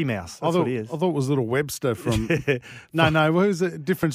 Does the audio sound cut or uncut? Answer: uncut